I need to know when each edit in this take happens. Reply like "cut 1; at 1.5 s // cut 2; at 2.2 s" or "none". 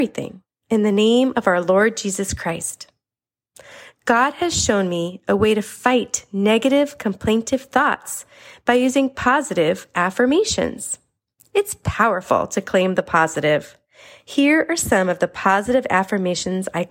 none